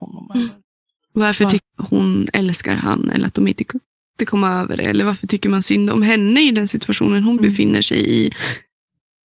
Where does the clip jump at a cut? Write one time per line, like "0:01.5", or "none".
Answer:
0:01.6